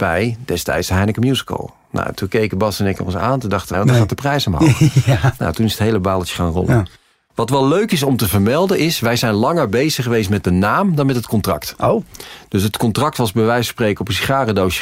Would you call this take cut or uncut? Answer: cut